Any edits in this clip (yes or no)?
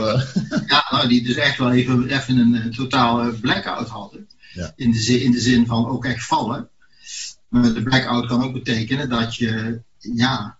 no